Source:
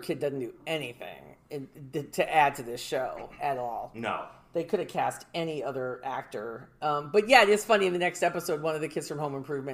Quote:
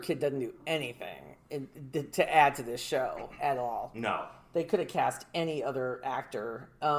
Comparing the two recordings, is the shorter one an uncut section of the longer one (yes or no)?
yes